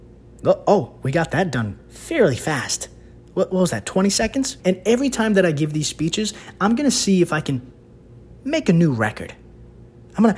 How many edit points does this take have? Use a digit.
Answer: 2